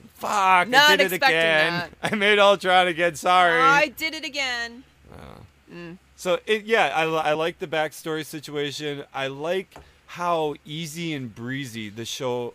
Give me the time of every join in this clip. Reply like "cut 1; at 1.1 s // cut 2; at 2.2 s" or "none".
none

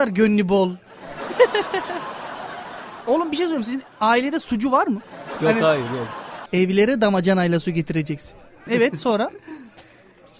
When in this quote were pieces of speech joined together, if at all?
cut 1; at 6.5 s // cut 2; at 8.7 s

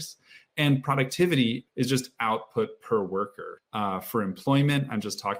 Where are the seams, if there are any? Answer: cut 1; at 1.7 s // cut 2; at 3.6 s

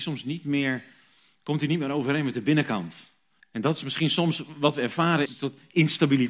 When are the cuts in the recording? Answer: cut 1; at 3.4 s // cut 2; at 5.3 s

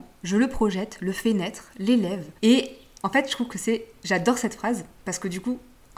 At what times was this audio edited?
cut 1; at 2.4 s

